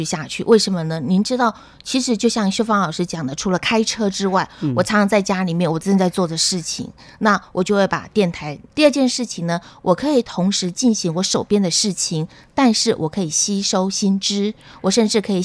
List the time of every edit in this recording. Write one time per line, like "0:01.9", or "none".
0:08.7